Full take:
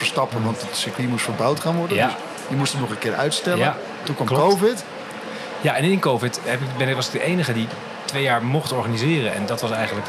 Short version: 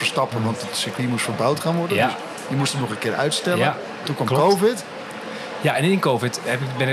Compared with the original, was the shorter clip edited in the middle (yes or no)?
no